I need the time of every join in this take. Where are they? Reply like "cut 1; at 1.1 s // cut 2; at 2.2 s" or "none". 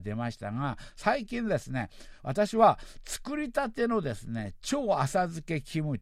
none